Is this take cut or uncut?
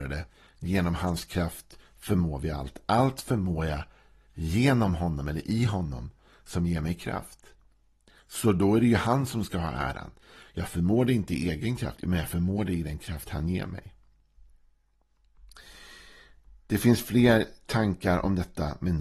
uncut